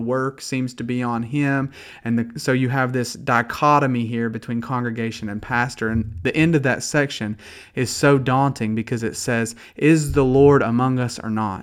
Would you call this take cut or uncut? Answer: uncut